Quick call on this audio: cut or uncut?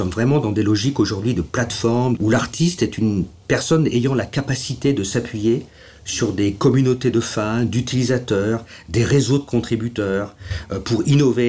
cut